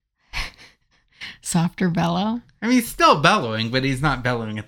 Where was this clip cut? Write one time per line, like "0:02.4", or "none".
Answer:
none